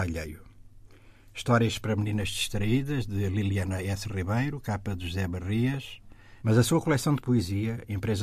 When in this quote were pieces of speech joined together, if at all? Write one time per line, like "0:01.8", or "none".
0:06.4